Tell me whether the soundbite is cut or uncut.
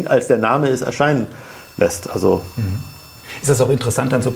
uncut